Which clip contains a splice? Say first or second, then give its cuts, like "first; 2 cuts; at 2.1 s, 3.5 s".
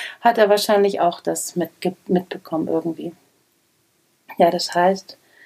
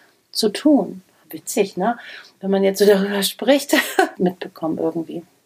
second; 2 cuts; at 1.2 s, 4.1 s